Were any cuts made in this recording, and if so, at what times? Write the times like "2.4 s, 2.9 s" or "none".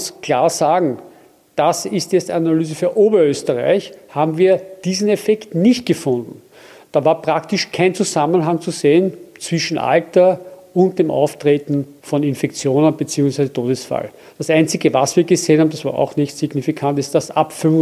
none

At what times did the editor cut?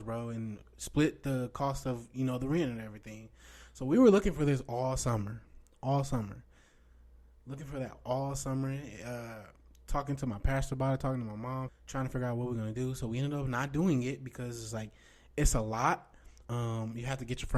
11.7 s

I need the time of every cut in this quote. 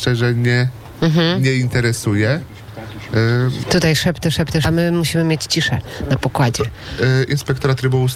3.6 s, 4.6 s

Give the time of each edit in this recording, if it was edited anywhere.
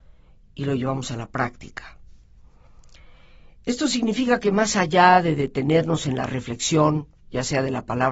none

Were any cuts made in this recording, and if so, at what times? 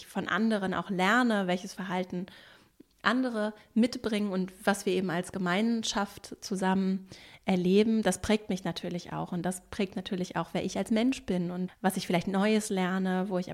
11.7 s

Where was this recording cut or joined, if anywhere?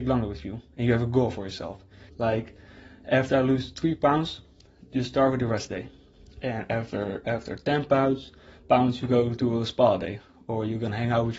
2.1 s

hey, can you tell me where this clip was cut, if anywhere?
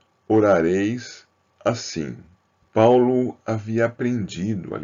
2.6 s

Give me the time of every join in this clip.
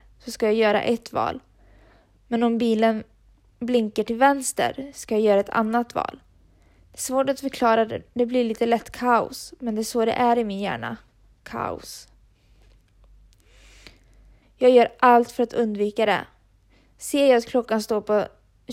14.4 s

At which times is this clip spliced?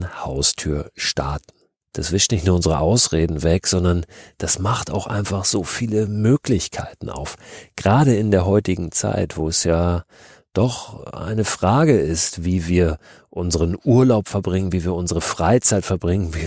none

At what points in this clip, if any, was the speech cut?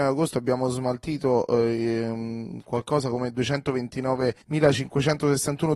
4.4 s

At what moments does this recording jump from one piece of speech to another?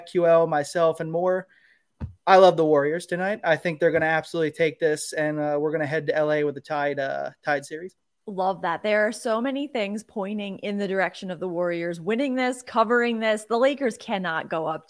none

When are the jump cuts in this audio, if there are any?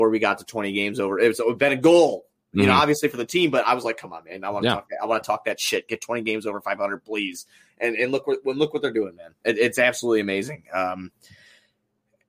none

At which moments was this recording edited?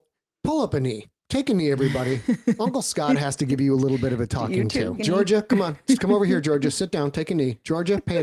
5.0 s

